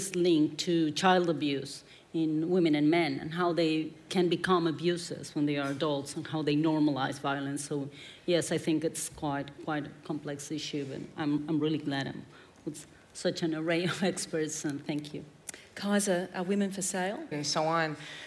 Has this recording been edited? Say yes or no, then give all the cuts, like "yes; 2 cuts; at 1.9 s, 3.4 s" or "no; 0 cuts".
yes; 1 cut; at 17.3 s